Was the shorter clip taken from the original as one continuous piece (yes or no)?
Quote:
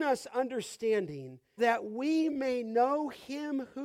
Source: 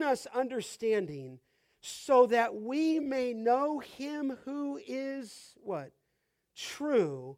no